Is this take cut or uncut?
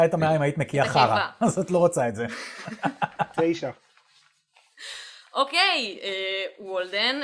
uncut